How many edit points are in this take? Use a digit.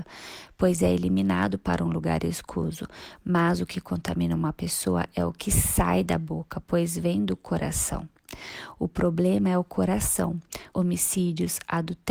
1